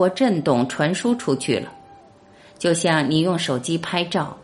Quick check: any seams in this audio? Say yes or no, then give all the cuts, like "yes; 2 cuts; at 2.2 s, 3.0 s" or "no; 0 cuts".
no; 0 cuts